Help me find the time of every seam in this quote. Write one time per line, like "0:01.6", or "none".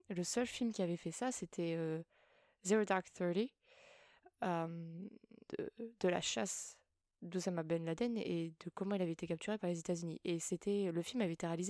0:05.5